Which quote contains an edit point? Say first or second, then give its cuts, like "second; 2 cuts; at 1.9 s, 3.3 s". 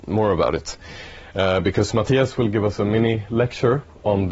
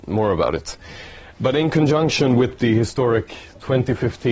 second; 1 cut; at 1.3 s